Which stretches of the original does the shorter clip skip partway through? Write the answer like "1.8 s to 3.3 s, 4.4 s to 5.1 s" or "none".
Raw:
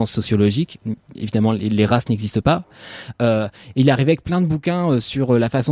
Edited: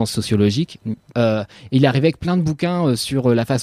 1.1 s to 3.2 s